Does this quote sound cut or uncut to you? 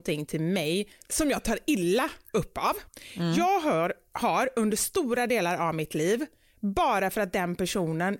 uncut